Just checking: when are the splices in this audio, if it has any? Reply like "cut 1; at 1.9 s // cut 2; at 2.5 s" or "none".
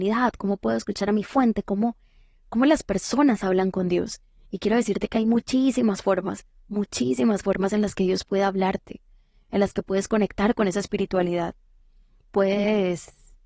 none

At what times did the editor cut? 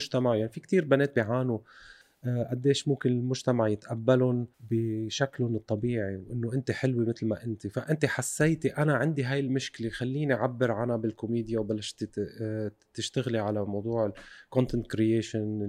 cut 1; at 4.5 s

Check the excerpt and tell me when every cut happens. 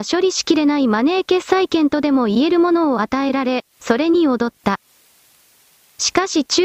none

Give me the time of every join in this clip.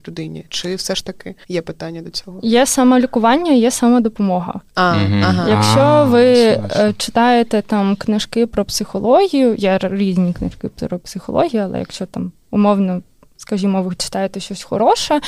cut 1; at 1.4 s

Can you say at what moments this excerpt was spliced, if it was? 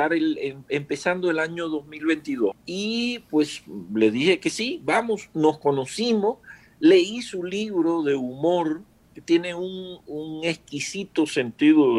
cut 1; at 2.5 s

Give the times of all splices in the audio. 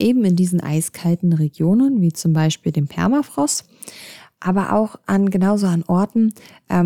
none

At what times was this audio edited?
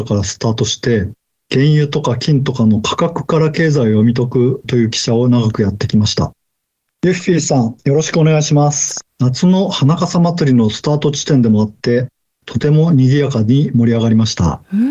cut 1; at 6.9 s // cut 2; at 9.0 s // cut 3; at 12.4 s

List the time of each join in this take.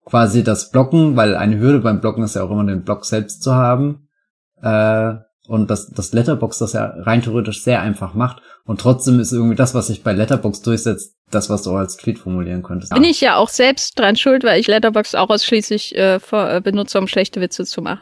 cut 1; at 11.2 s // cut 2; at 12.9 s

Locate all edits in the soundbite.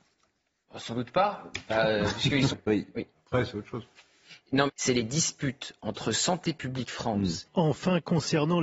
cut 1; at 2.5 s // cut 2; at 4.7 s // cut 3; at 7.4 s

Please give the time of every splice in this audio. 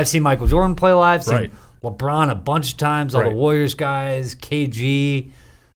none

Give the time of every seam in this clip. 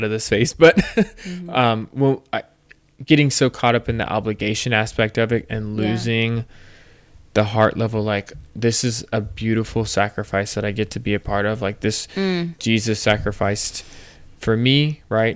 none

